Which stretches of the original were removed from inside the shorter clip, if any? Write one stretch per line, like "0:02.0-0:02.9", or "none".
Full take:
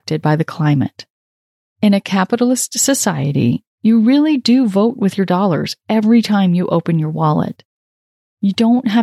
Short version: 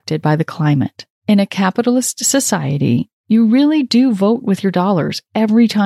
0:01.1-0:01.7